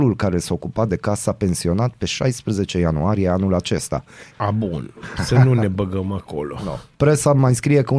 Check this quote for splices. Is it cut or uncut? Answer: cut